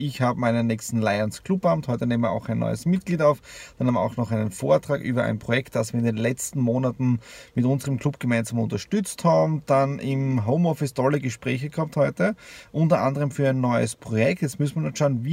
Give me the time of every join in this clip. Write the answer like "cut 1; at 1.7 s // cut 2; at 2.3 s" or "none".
none